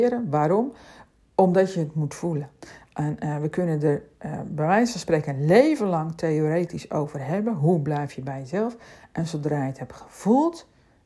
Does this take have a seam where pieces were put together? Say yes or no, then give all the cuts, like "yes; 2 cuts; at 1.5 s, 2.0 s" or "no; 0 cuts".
no; 0 cuts